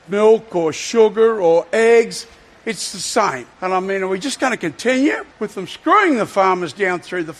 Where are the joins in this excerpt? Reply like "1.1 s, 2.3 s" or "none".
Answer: 3.5 s, 5.3 s